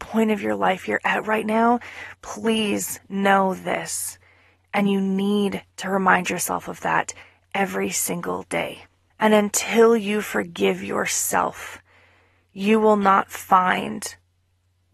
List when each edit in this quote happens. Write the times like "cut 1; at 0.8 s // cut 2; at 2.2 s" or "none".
cut 1; at 4.6 s // cut 2; at 9.1 s